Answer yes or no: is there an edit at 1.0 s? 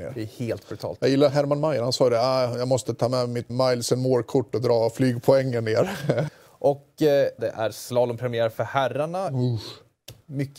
no